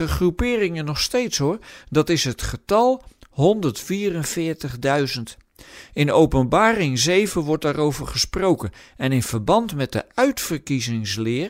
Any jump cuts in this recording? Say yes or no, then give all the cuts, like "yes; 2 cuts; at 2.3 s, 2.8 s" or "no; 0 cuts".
no; 0 cuts